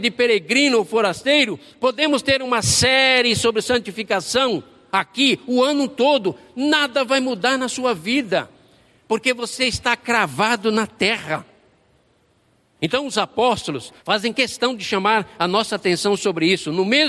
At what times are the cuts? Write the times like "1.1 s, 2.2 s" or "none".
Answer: 12.8 s, 14.0 s